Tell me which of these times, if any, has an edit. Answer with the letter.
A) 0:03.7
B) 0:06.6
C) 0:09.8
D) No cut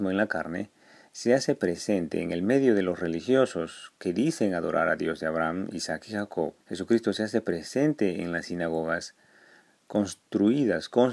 B